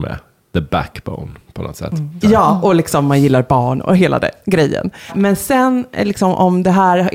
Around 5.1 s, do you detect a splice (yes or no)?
yes